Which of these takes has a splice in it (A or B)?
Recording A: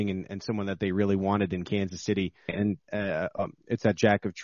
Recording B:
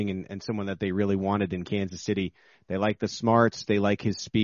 A